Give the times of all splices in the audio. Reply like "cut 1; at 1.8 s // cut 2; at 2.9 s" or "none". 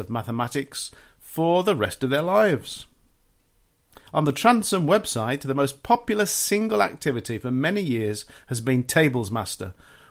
none